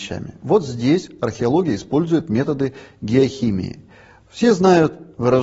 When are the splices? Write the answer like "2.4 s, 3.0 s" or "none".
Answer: none